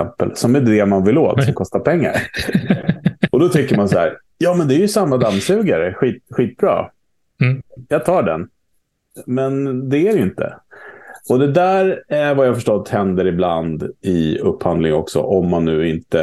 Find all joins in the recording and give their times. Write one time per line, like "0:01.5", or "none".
none